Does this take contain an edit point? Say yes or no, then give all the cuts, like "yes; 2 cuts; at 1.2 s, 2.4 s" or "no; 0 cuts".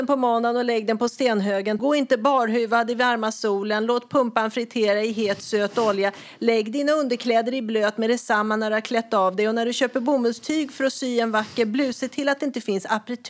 yes; 1 cut; at 1.8 s